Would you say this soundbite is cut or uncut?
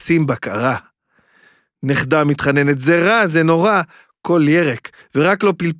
uncut